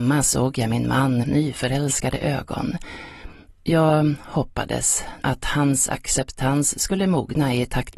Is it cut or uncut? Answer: cut